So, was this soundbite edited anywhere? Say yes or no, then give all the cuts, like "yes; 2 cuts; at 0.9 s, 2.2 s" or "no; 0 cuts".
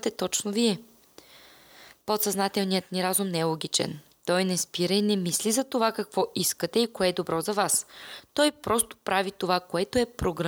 no; 0 cuts